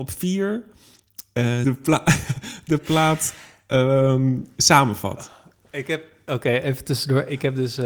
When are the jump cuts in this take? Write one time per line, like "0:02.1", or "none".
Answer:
0:01.6